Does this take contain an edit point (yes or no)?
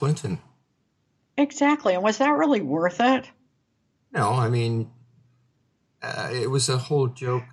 no